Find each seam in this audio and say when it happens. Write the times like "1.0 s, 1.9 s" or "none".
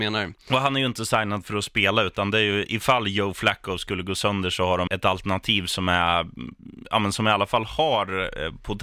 4.9 s